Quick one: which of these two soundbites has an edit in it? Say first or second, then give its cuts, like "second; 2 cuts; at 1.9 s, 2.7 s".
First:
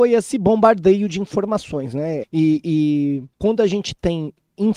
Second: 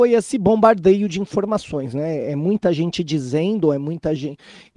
first; 2 cuts; at 2.2 s, 3.3 s